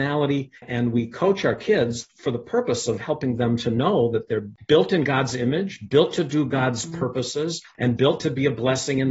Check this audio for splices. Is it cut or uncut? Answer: uncut